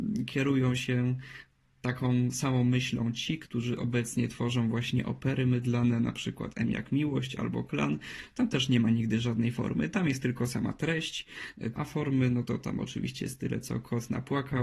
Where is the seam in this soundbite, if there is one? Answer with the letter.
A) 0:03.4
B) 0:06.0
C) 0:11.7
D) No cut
C